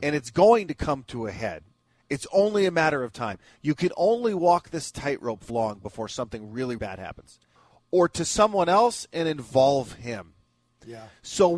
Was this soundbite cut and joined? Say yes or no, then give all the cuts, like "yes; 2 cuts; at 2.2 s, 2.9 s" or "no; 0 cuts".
yes; 2 cuts; at 5.5 s, 6.8 s